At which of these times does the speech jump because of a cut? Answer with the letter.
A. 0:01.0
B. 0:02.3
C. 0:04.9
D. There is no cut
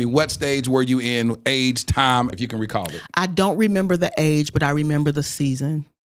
B